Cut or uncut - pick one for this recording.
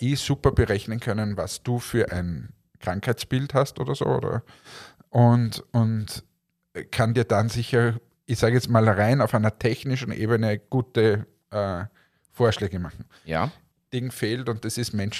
cut